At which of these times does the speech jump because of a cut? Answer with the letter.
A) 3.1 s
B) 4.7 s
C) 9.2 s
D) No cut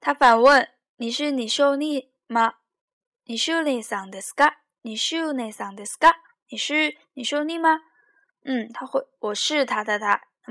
C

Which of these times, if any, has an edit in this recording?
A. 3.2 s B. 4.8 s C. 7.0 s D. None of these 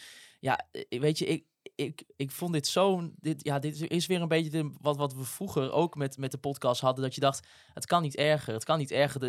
D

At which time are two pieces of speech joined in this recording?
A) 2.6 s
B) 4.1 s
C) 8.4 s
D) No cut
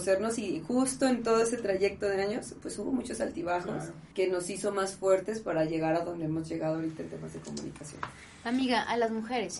B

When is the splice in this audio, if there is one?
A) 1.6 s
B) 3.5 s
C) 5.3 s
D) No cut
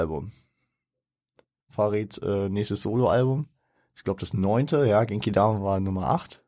A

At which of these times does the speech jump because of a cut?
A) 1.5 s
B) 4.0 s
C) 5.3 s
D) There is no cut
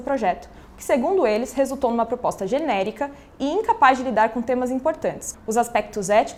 C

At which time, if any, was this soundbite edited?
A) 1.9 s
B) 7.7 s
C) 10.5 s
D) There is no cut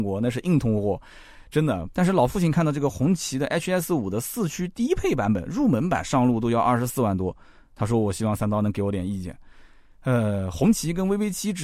A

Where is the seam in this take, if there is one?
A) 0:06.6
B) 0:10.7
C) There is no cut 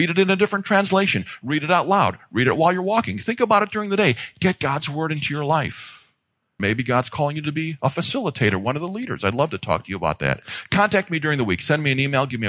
A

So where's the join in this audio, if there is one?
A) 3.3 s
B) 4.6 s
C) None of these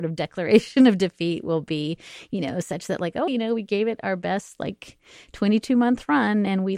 A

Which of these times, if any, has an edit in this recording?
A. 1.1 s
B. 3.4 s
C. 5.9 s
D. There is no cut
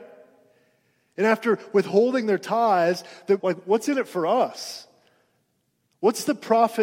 B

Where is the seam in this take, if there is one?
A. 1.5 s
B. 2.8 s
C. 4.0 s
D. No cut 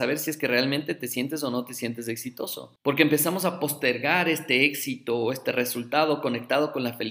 B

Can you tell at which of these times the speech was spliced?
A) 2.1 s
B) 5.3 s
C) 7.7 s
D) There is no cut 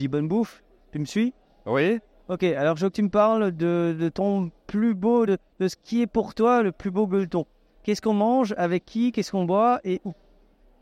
D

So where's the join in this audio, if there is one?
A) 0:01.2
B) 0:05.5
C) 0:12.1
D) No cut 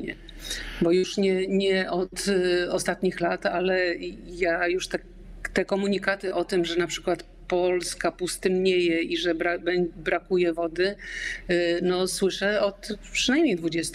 D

